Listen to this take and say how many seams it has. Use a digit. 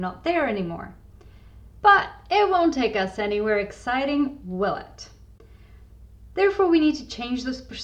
1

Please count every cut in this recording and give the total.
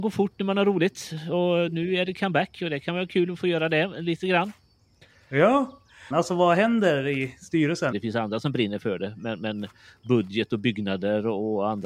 2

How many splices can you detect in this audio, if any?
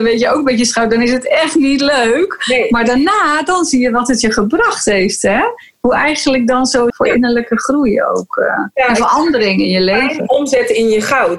1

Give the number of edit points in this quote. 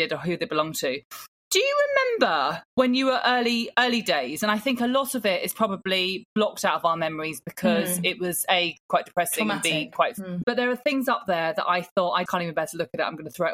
3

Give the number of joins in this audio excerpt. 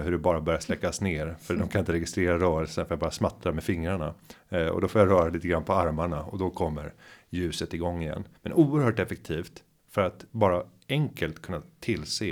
1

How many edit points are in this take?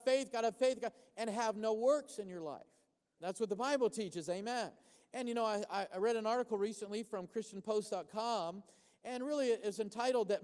1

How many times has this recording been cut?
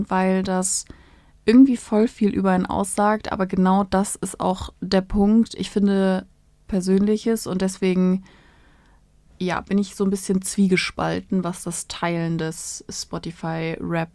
1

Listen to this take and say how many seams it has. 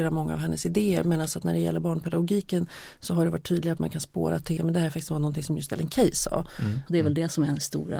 2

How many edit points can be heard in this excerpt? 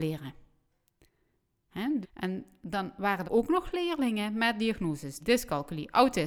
3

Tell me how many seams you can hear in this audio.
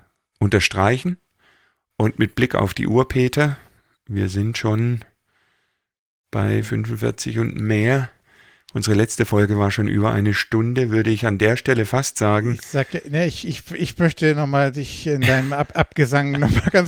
0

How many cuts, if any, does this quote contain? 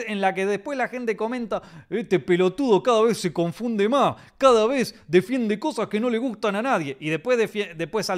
0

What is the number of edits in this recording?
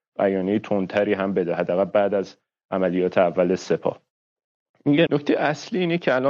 1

